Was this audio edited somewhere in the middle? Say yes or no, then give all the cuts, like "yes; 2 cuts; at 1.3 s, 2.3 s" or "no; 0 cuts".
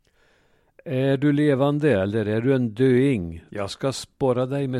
yes; 1 cut; at 3.5 s